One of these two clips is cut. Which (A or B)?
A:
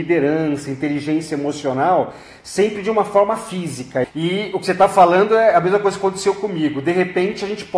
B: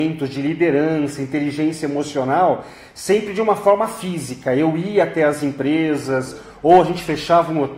A